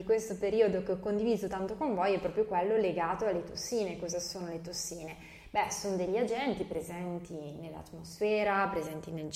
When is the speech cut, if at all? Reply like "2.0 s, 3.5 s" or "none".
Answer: none